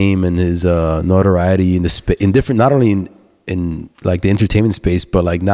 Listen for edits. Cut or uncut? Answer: cut